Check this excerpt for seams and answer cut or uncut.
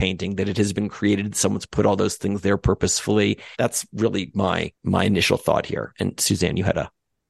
cut